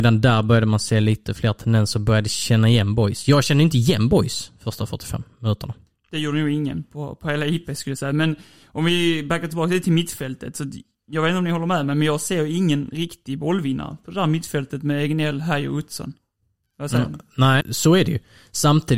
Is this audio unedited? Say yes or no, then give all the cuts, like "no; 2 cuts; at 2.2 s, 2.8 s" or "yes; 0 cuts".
no; 1 cut; at 17.6 s